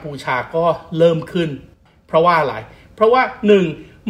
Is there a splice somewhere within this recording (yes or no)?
no